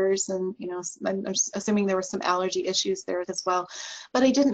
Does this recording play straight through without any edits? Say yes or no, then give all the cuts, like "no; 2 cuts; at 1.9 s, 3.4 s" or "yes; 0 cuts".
no; 1 cut; at 3.2 s